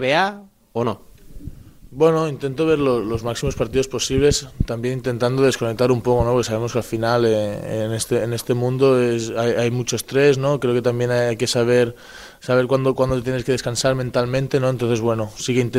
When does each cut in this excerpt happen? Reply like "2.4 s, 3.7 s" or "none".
none